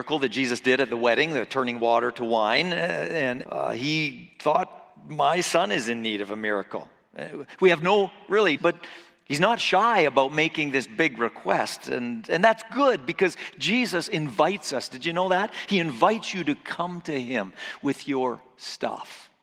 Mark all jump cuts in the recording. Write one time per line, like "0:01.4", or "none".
0:03.4
0:08.6